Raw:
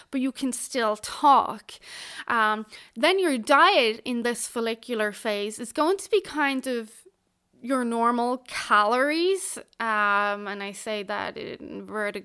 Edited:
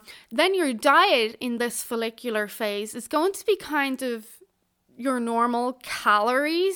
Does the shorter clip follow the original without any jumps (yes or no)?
yes